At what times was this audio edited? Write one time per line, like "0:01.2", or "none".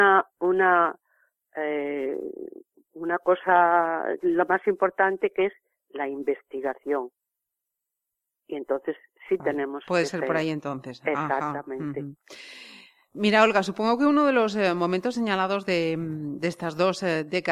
none